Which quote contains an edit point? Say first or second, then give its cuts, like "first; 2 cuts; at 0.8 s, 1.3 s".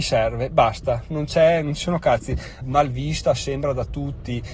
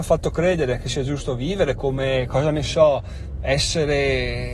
first; 1 cut; at 2.6 s